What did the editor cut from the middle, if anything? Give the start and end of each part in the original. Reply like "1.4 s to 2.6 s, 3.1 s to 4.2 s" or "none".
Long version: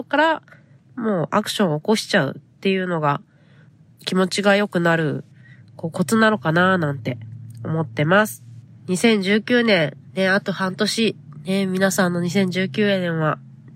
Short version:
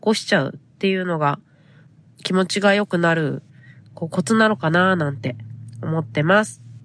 none